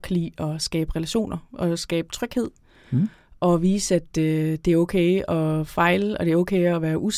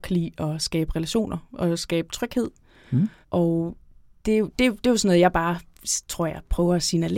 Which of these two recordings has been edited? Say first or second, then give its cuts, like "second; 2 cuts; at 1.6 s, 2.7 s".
second; 1 cut; at 3.2 s